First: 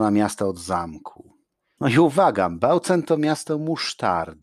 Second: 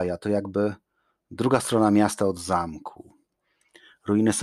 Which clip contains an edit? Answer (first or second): first